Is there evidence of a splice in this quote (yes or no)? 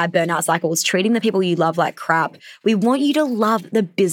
no